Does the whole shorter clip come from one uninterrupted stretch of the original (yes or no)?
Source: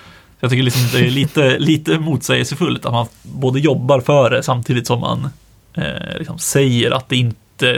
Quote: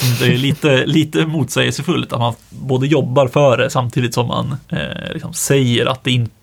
no